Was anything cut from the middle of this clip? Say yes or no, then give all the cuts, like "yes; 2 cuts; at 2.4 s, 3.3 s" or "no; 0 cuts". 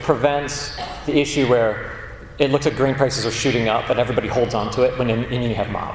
no; 0 cuts